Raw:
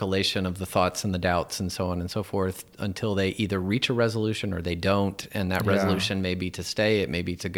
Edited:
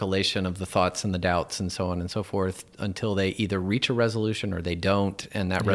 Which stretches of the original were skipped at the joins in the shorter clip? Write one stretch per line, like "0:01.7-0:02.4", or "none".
none